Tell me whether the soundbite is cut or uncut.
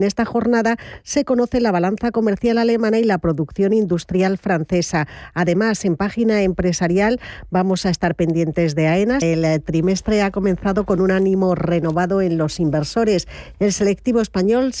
cut